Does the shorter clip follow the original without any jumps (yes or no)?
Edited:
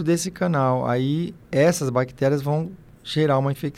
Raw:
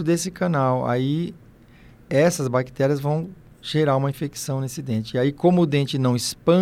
no